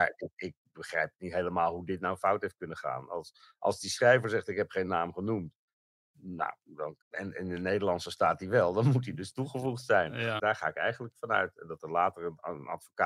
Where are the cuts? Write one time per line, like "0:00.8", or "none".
0:07.0
0:10.4

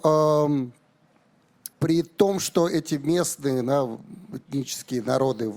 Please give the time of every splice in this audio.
0:01.7

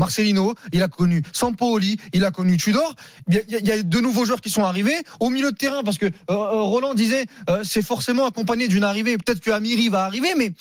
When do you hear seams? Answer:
none

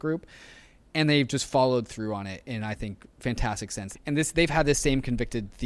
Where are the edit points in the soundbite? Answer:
0:03.9

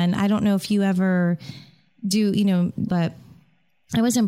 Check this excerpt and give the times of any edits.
0:02.9

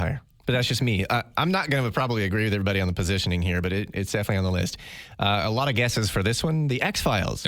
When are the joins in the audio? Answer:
none

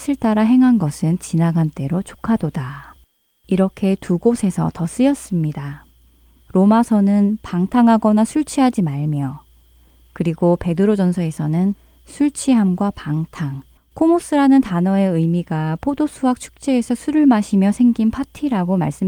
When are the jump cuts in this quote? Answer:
0:06.4
0:13.8

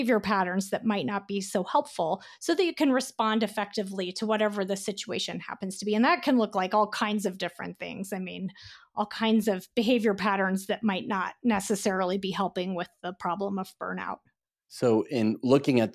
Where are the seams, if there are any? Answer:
none

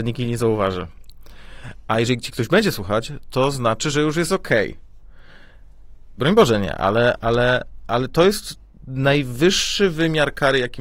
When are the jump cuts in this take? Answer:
0:06.2

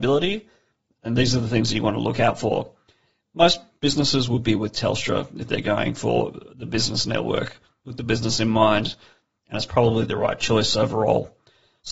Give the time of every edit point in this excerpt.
none

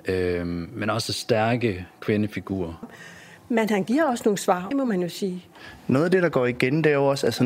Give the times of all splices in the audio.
0:02.8
0:04.7

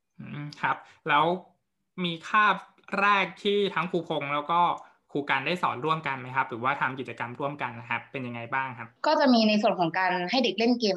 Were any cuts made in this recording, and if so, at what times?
0:09.0

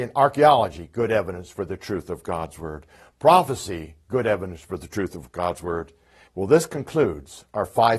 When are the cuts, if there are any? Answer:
0:06.3

